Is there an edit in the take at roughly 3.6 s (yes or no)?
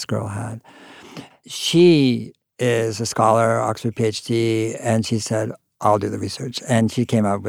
no